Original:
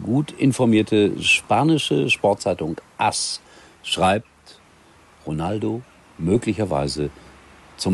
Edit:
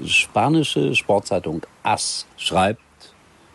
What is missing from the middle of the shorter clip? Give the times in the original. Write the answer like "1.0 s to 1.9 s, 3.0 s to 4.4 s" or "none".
3.5 s to 3.8 s